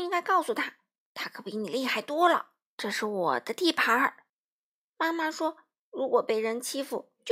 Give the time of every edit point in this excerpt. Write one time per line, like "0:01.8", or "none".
0:02.7
0:04.3